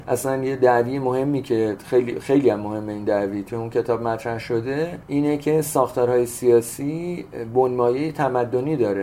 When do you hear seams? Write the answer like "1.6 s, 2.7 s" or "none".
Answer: none